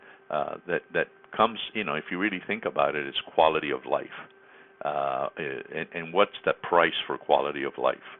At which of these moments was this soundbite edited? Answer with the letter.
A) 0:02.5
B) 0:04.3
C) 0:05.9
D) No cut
C